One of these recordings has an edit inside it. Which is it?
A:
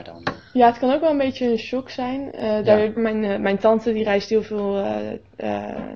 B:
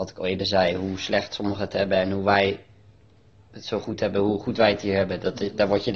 A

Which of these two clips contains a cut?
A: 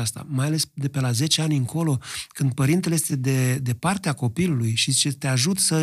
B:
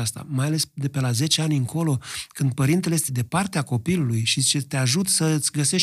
B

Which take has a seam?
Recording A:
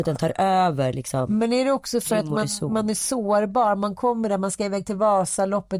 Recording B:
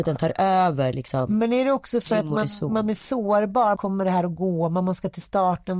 B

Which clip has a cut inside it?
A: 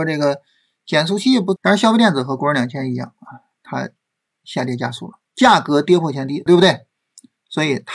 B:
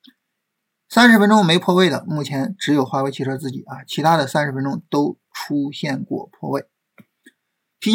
A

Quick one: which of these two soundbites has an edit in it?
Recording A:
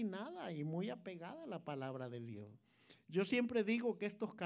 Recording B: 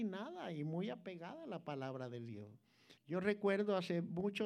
B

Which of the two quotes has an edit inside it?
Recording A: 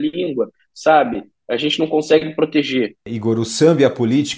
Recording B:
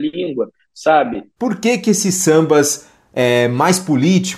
B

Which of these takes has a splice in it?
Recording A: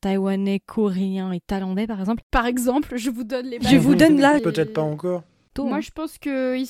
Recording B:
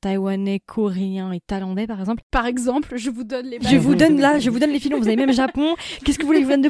A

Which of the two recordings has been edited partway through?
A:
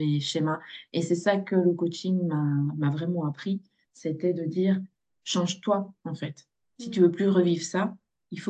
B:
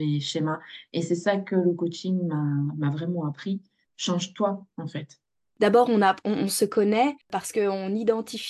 B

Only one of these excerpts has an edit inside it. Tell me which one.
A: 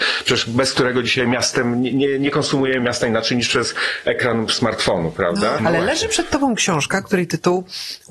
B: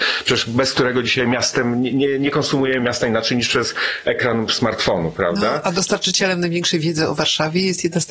A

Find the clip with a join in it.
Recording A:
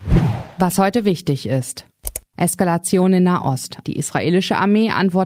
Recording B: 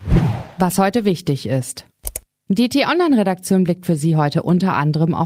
A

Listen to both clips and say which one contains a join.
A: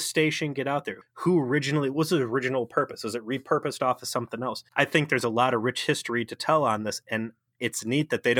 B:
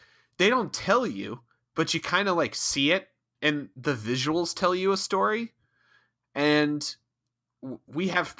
A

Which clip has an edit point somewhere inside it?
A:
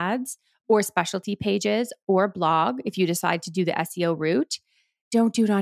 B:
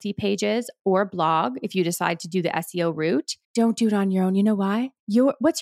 B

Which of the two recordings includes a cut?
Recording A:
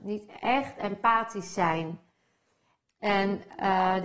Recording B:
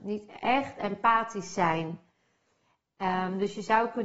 A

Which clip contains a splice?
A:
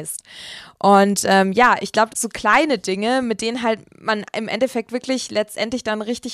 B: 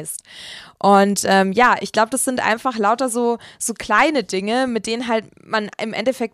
A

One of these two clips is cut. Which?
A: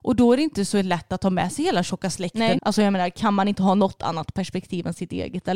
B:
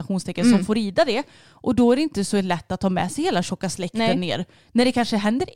A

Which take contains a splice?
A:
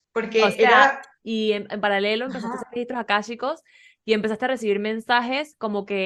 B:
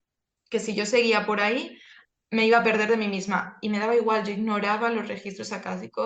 A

